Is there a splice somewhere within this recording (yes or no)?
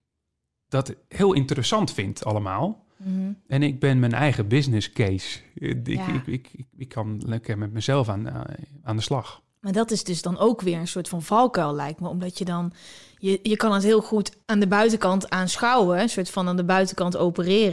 yes